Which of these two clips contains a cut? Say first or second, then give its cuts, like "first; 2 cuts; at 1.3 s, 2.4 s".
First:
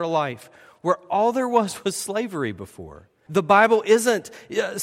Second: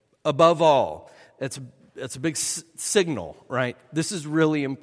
first; 1 cut; at 3.3 s